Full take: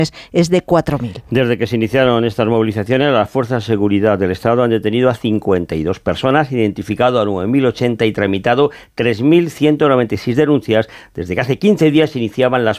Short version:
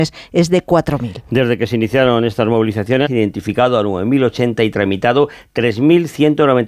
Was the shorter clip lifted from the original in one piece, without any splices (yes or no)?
no